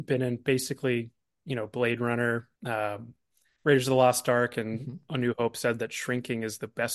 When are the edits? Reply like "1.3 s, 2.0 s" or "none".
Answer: 2.6 s